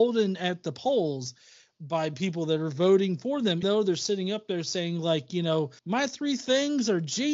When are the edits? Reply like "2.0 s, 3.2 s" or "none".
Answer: 3.6 s, 5.8 s